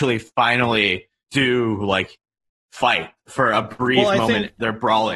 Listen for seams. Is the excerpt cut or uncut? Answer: uncut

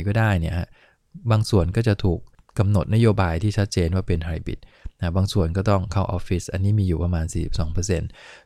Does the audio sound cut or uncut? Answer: uncut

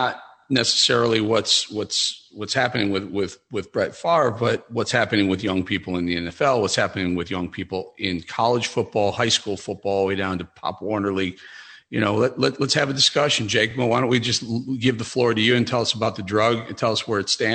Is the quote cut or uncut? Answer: uncut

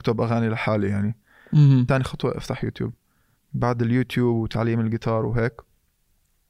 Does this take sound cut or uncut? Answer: cut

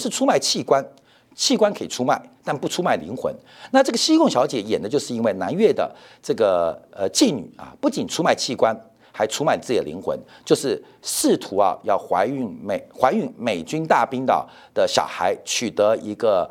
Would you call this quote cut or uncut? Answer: uncut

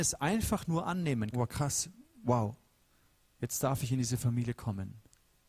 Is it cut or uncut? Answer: cut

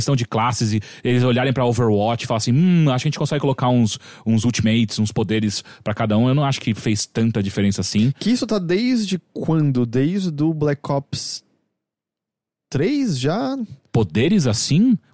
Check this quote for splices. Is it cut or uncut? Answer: uncut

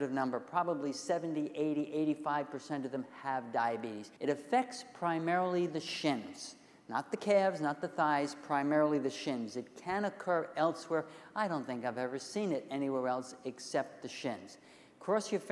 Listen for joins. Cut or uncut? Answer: cut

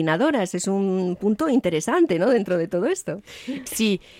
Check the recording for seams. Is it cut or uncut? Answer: uncut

